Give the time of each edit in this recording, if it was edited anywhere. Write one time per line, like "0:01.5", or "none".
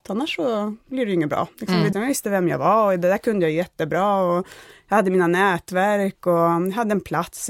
0:01.9